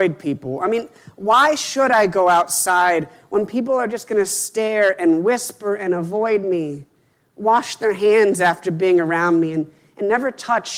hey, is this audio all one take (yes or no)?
yes